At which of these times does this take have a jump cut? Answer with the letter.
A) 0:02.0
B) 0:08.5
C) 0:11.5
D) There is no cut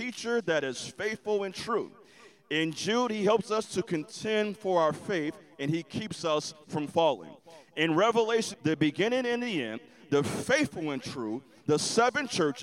B